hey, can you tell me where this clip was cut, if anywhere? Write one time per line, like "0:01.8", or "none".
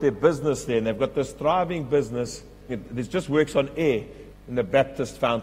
0:02.7
0:04.3